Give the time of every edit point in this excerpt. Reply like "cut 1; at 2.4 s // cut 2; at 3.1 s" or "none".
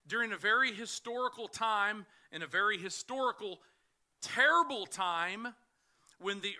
none